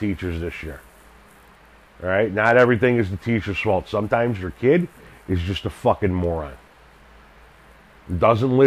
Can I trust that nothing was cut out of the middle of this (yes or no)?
yes